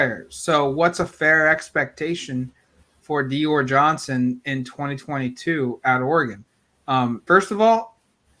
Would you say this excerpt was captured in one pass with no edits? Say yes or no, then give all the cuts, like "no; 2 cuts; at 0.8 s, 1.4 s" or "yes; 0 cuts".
no; 2 cuts; at 3.0 s, 7.3 s